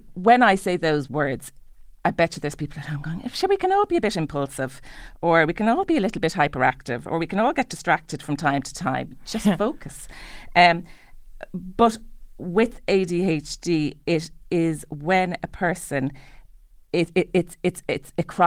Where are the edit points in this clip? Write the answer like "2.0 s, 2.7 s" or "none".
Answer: none